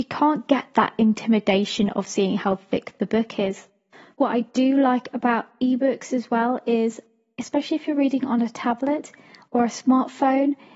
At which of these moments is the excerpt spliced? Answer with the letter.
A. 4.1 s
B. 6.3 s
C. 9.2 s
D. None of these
D